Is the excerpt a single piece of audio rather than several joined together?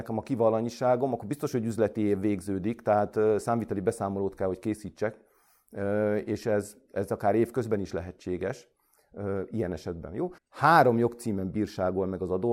no; 1 cut; at 10.4 s

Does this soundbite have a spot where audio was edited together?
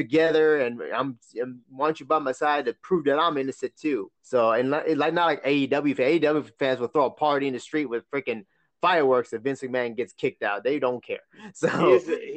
yes; 1 cut; at 4.2 s

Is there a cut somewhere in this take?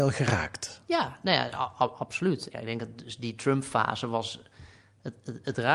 yes; 1 cut; at 2.5 s

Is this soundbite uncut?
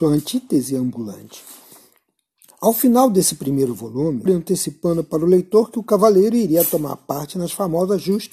no; 1 cut; at 4.3 s

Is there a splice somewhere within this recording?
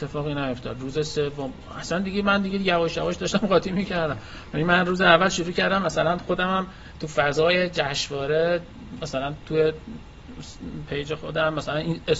no; 0 cuts

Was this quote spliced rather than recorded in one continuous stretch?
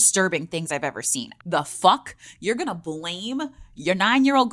yes; 1 cut; at 1.4 s

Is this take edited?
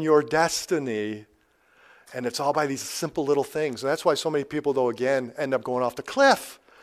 no; 0 cuts

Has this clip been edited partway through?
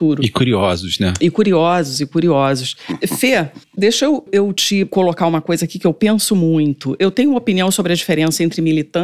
yes; 1 cut; at 4.3 s

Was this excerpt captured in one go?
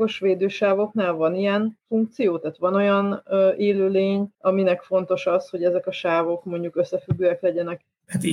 no; 1 cut; at 4.3 s

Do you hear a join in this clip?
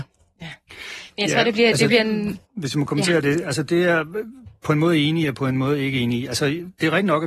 yes; 1 cut; at 2.4 s

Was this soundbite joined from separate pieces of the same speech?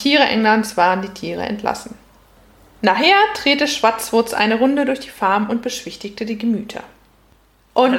no; 0 cuts

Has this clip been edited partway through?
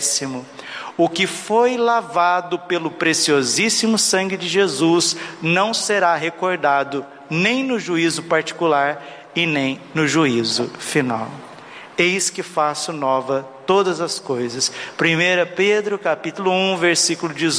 no; 0 cuts

